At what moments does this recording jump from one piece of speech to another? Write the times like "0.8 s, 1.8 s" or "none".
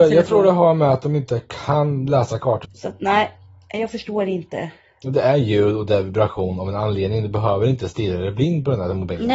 2.6 s

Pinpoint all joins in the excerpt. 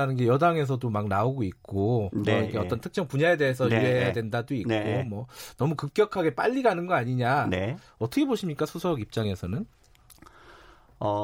none

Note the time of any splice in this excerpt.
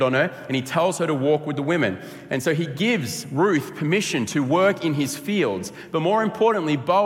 none

